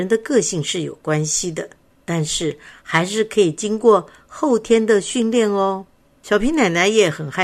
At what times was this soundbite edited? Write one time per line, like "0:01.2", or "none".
none

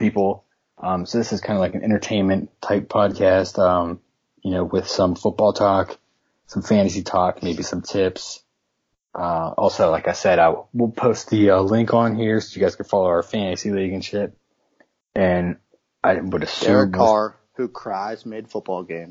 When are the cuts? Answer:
0:15.0

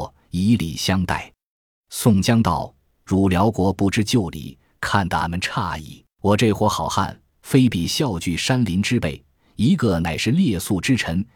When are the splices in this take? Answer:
0:06.1
0:09.8

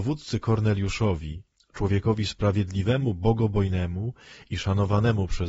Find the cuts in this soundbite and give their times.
none

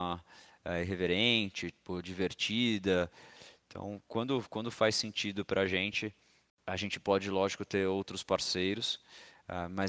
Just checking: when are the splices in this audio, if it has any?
0:06.5

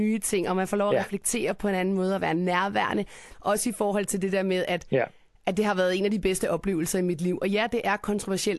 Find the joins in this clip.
0:03.3

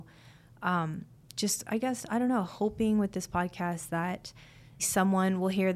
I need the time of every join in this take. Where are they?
0:04.8

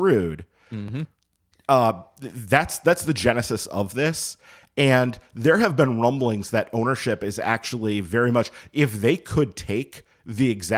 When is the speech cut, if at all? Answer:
none

